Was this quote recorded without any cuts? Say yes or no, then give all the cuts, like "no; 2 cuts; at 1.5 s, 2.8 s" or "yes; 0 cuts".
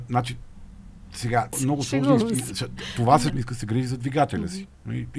no; 2 cuts; at 1.5 s, 3.3 s